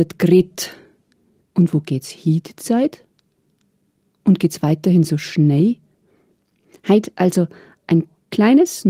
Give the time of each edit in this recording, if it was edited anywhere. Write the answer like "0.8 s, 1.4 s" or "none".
1.4 s